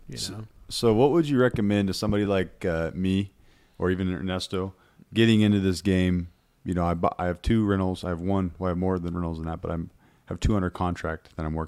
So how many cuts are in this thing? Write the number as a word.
zero